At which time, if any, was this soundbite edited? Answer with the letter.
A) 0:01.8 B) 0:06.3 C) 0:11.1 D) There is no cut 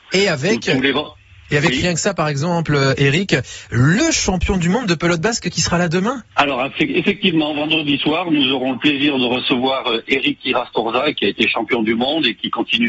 B